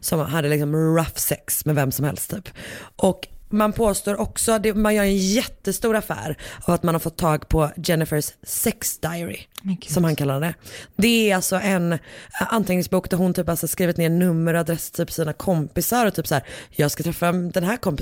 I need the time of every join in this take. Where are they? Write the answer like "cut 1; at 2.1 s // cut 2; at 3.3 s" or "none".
none